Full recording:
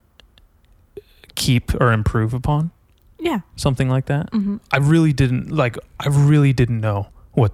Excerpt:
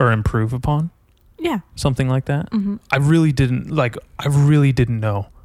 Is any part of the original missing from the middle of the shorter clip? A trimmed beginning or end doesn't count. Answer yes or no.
no